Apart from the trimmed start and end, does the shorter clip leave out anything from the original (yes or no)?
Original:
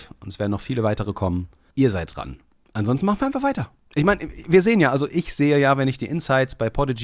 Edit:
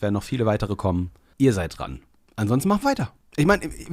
yes